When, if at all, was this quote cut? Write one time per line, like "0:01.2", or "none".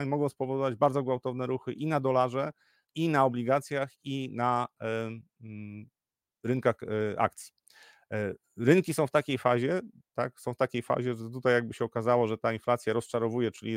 0:02.8
0:10.1